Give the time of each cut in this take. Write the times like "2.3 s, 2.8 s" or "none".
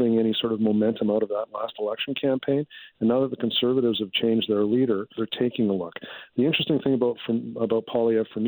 5.2 s